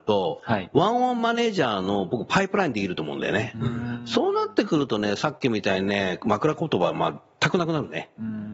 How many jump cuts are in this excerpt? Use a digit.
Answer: 0